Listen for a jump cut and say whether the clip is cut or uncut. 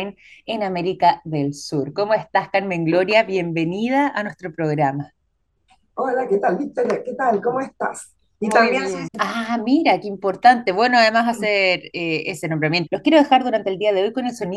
cut